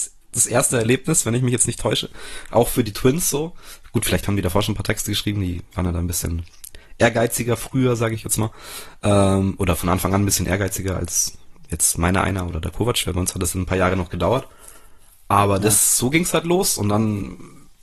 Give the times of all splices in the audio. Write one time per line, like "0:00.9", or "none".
none